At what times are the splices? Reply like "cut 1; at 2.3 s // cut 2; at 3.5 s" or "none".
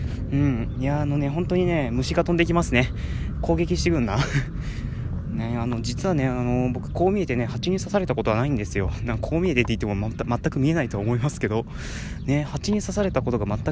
none